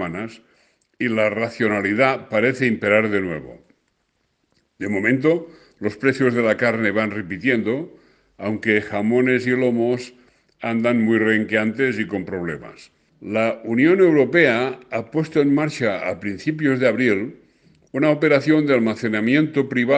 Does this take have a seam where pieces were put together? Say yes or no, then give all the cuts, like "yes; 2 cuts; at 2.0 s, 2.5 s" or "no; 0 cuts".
yes; 1 cut; at 13.1 s